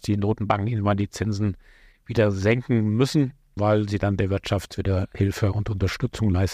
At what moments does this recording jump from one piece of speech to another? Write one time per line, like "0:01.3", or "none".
0:03.6